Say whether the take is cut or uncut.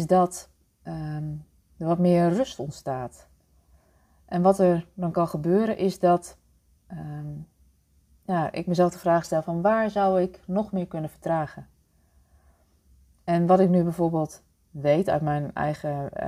uncut